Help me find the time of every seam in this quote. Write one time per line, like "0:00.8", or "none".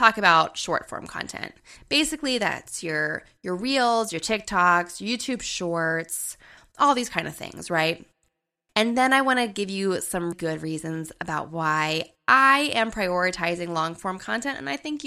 0:08.7
0:10.3